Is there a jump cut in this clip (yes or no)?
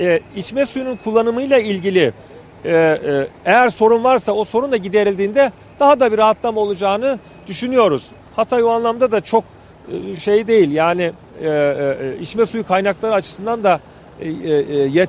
no